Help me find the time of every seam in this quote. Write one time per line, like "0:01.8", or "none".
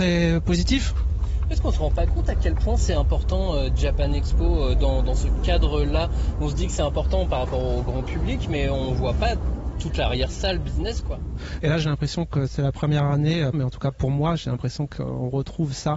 0:11.6
0:13.5